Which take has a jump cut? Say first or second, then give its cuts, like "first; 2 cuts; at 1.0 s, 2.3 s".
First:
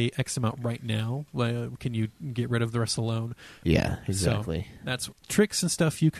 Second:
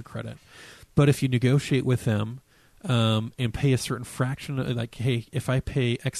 first; 2 cuts; at 3.6 s, 5.1 s